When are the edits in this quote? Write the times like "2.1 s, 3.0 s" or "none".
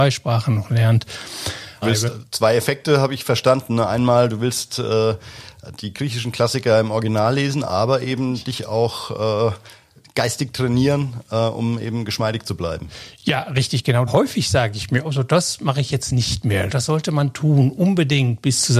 1.8 s, 14.1 s, 16.7 s